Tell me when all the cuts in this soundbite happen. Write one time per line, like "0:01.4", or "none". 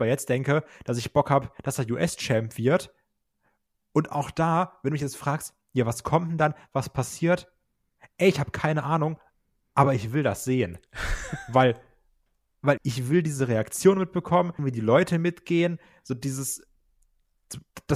0:12.8
0:14.6